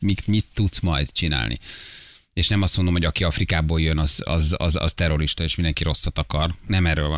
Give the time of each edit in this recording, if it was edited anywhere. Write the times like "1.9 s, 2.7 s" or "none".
none